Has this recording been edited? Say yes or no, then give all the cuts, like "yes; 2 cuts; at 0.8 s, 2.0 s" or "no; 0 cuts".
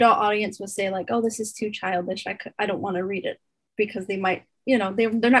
no; 0 cuts